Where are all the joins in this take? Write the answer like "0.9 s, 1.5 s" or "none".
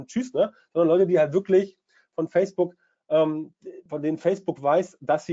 3.9 s